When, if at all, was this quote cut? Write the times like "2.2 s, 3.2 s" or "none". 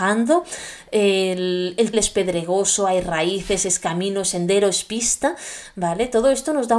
1.9 s